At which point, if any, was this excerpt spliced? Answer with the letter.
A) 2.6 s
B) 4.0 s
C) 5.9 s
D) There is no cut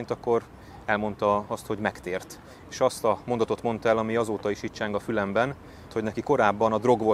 C